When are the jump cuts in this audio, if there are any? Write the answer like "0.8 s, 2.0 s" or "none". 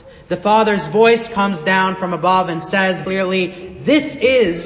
3.0 s